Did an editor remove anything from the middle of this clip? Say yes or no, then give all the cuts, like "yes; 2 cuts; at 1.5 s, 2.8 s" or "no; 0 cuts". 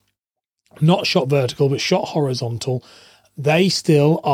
no; 0 cuts